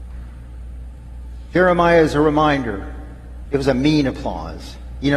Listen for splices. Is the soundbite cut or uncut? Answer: cut